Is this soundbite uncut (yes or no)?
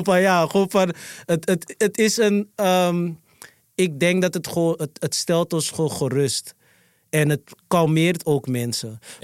yes